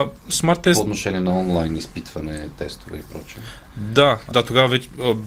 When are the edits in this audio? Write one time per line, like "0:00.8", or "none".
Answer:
0:04.3